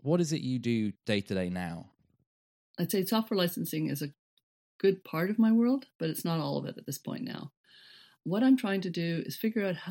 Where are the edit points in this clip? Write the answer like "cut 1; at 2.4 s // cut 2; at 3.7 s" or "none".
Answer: none